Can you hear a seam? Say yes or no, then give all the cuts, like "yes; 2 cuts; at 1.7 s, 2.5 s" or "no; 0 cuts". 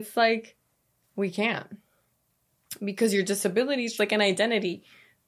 yes; 1 cut; at 4.0 s